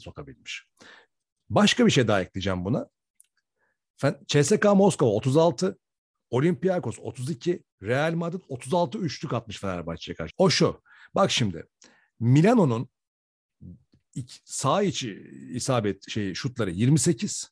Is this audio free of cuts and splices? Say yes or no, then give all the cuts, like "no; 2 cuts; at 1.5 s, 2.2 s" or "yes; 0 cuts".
no; 2 cuts; at 7.7 s, 10.3 s